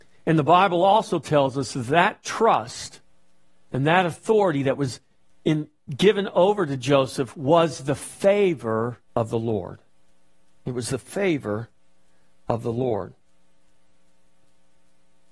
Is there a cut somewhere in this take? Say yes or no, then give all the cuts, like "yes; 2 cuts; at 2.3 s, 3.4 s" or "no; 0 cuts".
yes; 1 cut; at 9.1 s